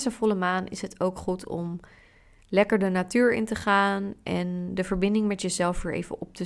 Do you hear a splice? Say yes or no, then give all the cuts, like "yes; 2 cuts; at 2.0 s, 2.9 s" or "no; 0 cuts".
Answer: no; 0 cuts